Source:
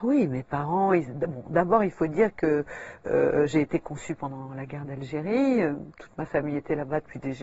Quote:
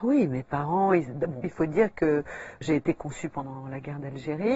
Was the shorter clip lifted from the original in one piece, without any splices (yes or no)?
no